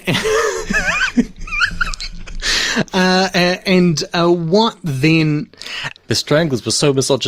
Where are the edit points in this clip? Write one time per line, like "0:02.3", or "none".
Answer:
0:06.0